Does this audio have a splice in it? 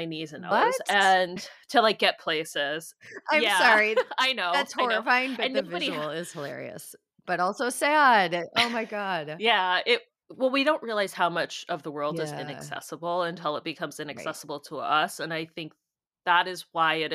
no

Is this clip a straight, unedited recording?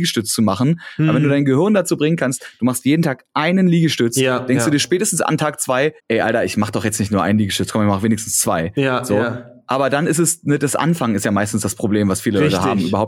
no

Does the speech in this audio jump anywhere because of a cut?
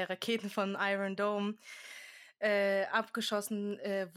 no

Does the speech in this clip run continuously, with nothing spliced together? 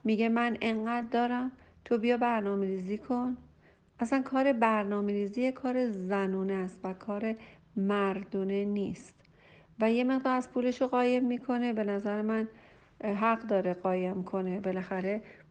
yes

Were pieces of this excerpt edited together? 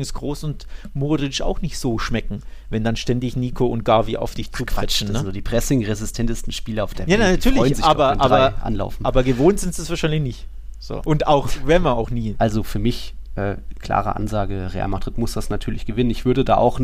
yes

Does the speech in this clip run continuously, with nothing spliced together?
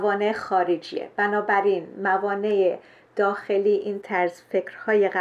yes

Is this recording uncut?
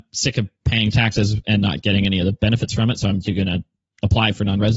yes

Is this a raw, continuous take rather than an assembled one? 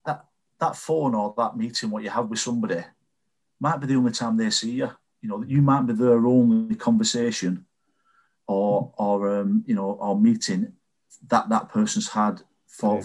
yes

